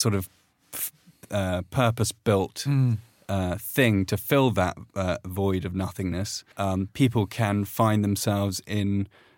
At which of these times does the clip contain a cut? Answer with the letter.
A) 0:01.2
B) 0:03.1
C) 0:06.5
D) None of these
C